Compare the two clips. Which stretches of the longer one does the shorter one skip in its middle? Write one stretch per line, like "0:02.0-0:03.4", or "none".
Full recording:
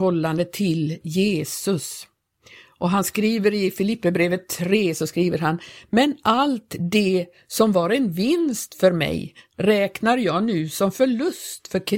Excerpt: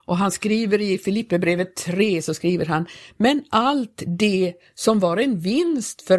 none